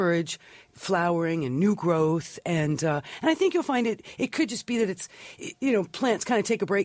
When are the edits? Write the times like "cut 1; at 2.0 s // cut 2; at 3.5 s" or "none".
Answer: none